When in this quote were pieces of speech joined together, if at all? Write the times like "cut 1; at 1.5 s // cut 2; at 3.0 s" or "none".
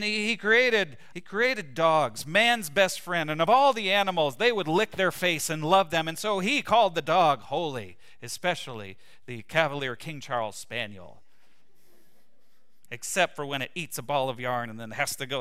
cut 1; at 1.1 s